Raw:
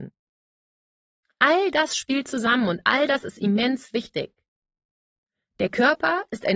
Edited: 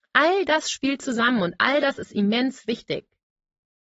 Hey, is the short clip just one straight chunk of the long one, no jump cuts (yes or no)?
yes